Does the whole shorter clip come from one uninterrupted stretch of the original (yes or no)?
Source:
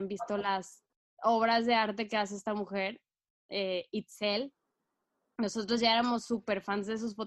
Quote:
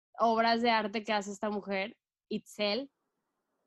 no